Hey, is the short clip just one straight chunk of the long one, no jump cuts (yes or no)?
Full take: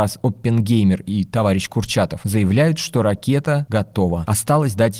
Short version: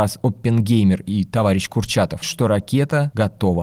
no